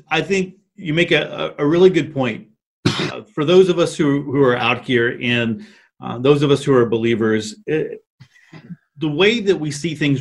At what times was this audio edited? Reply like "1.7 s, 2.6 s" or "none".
none